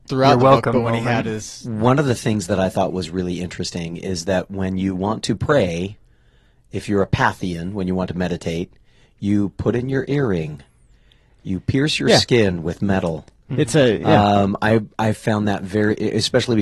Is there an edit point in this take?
no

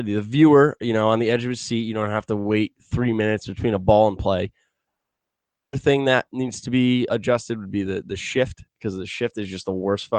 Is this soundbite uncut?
no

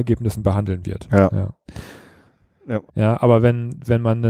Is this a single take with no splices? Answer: no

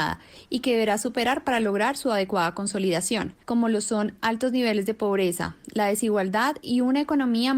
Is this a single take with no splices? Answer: no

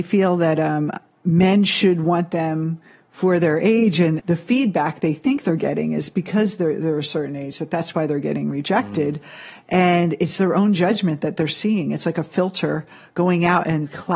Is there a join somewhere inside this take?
yes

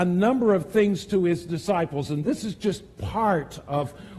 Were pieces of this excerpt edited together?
no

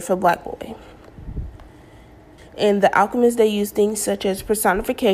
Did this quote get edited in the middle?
yes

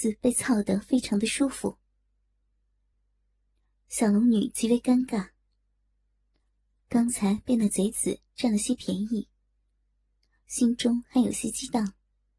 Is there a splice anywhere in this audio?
no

